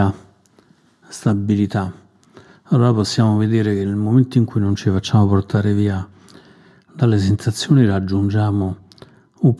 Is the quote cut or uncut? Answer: uncut